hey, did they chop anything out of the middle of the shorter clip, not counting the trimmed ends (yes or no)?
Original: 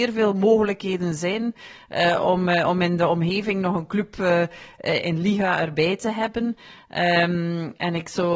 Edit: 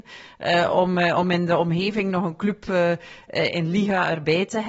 no